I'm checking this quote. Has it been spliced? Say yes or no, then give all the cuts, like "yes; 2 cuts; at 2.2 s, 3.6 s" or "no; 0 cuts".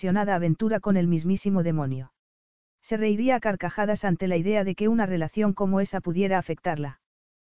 yes; 1 cut; at 2.7 s